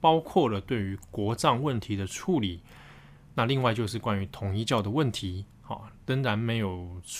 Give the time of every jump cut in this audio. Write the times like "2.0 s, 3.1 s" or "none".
none